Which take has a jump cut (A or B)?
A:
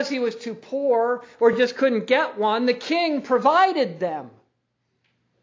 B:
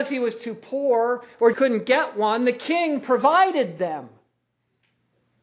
B